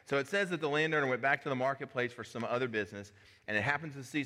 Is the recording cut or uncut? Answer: uncut